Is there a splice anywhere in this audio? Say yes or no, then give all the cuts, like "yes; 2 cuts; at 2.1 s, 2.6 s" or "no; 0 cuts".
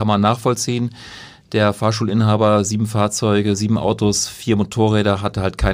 no; 0 cuts